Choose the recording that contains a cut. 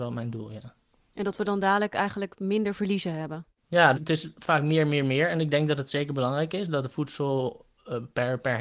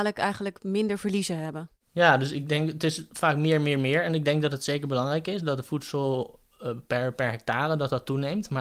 first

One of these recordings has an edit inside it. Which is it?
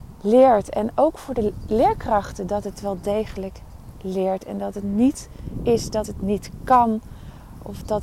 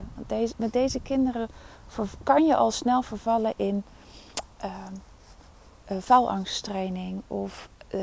first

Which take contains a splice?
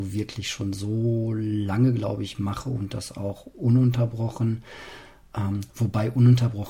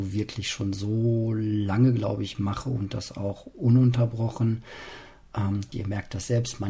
second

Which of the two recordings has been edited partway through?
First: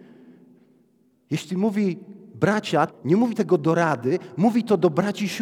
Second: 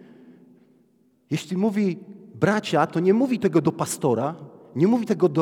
first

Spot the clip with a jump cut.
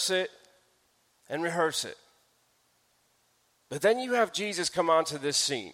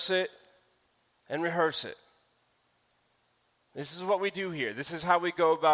first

